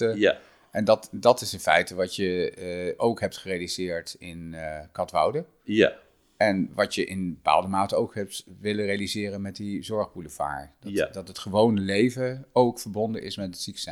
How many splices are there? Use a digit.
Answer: 0